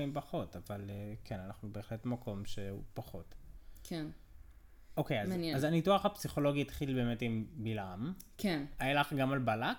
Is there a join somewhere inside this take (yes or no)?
no